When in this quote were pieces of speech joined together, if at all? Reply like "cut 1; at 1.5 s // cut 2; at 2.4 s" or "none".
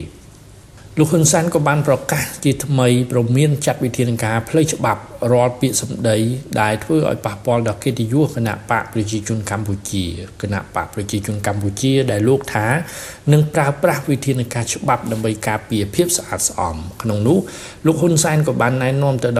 none